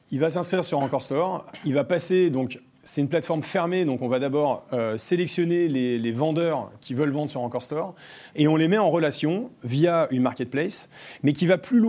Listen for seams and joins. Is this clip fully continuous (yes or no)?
no